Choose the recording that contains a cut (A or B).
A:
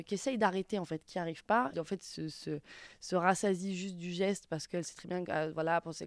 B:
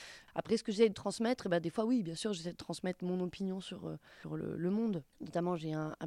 A